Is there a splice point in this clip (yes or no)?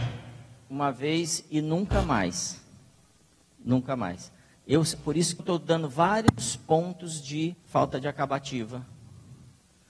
yes